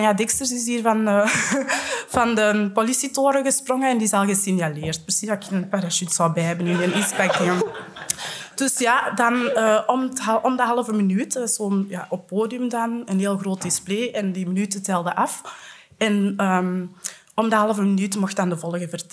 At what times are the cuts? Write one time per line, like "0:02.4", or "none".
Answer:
none